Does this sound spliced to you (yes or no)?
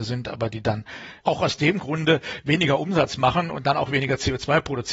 yes